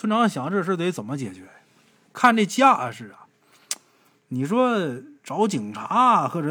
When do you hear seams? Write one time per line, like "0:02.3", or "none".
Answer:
none